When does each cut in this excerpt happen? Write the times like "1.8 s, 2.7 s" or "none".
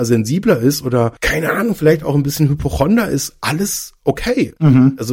1.2 s